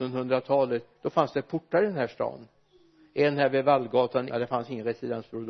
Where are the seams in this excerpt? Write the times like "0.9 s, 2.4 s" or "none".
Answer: 4.3 s